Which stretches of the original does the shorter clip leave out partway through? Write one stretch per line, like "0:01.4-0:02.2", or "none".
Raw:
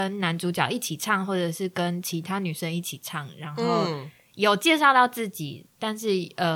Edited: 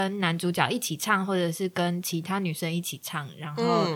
none